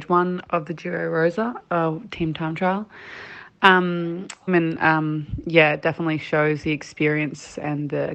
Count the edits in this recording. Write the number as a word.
one